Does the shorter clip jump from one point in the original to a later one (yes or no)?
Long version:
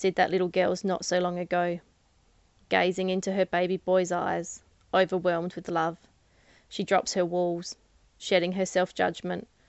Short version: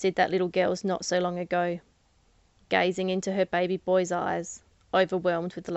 no